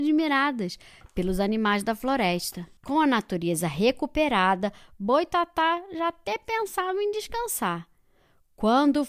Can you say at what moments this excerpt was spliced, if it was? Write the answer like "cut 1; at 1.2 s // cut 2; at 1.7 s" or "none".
cut 1; at 2.8 s